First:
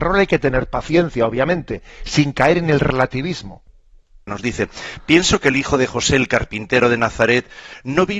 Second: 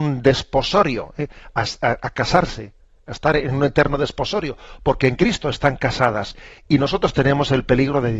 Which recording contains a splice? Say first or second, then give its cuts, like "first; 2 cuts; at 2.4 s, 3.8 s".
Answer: first; 1 cut; at 4.3 s